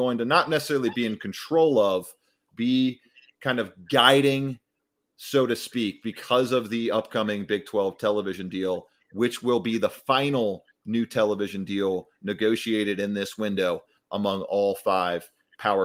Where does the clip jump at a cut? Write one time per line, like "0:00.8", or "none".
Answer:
0:02.5